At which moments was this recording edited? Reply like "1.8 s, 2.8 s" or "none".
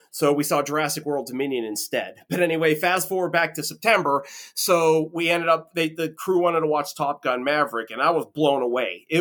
none